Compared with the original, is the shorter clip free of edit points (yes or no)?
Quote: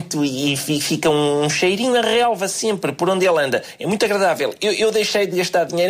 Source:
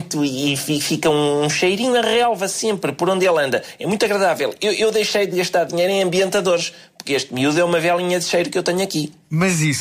yes